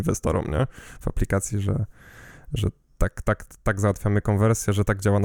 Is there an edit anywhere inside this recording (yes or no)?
no